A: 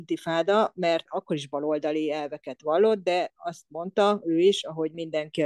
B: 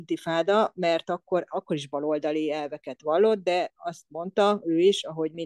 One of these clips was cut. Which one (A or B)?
A